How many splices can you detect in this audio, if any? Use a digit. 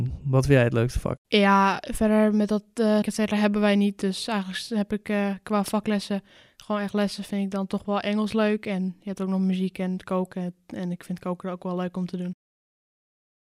2